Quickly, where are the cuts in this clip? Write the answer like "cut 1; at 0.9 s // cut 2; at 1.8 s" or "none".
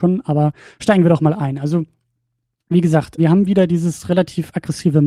cut 1; at 3.2 s